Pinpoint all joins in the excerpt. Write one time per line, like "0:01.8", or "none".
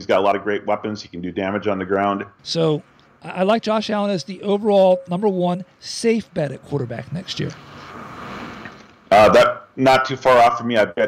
0:02.4